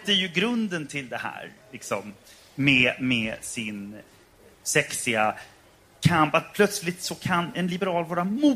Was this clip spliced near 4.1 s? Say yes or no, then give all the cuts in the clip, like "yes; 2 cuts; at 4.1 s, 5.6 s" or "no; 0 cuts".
no; 0 cuts